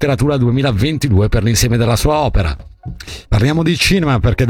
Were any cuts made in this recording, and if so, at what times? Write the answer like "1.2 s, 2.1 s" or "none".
3.3 s